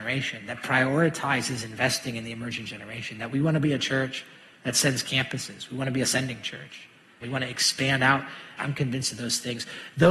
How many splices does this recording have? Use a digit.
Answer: 2